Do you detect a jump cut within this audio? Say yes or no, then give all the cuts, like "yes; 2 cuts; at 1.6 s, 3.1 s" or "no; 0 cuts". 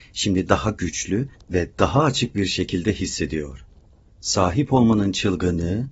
yes; 1 cut; at 4.1 s